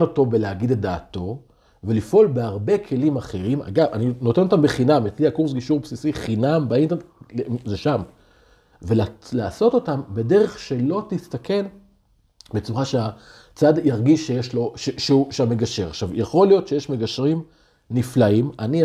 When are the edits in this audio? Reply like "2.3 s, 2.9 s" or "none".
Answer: none